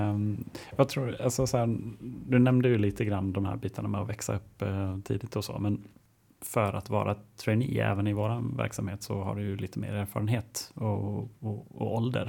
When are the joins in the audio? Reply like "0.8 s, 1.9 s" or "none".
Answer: none